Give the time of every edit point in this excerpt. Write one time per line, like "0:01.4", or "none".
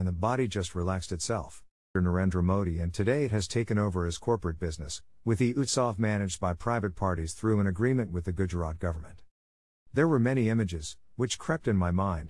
0:02.0
0:09.9